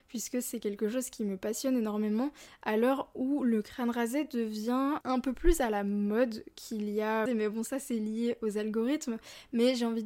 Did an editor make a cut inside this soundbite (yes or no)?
yes